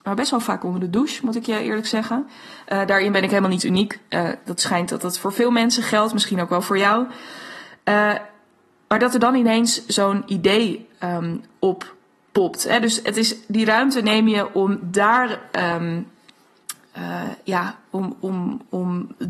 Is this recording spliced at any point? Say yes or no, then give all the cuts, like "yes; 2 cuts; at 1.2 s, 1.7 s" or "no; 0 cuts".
no; 0 cuts